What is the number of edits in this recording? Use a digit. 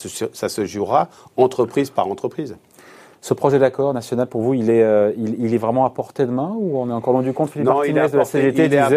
0